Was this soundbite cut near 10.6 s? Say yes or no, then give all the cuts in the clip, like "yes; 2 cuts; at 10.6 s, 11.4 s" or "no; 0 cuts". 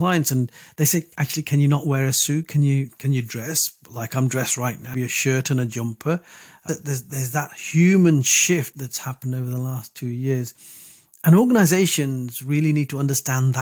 no; 3 cuts; at 1.1 s, 4.9 s, 6.7 s